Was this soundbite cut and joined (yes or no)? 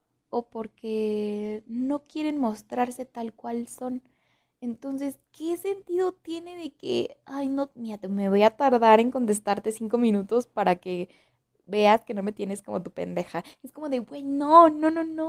no